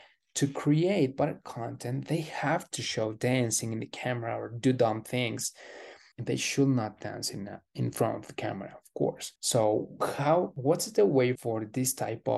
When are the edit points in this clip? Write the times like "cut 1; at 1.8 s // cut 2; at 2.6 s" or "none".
cut 1; at 6.1 s // cut 2; at 9.4 s // cut 3; at 11.4 s